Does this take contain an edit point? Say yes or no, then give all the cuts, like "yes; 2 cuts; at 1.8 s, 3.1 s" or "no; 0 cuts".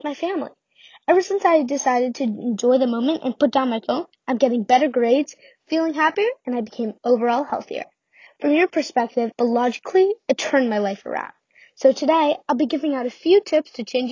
yes; 2 cuts; at 8.3 s, 9.3 s